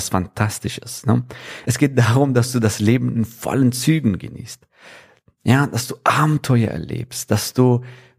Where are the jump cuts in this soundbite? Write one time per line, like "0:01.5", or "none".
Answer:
0:01.6

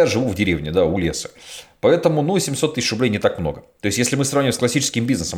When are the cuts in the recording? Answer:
none

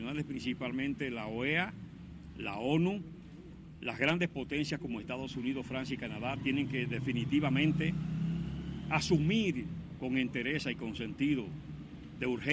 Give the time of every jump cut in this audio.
none

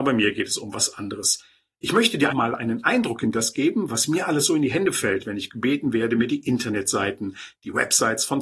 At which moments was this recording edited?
0:02.3

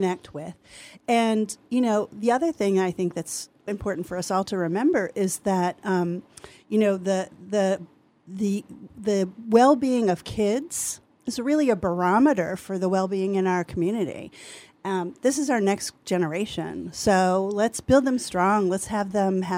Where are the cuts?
0:03.7

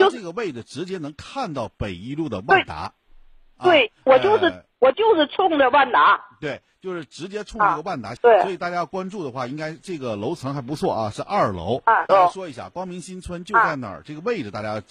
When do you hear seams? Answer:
0:08.2
0:12.1

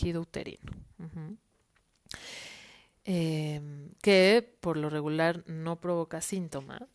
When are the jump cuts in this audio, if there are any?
none

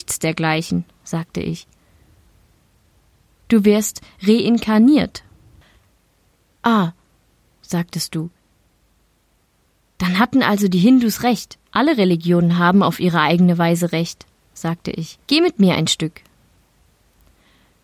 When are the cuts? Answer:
0:11.6
0:15.2

